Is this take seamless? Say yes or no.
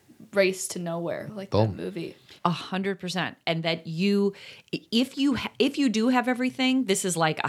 no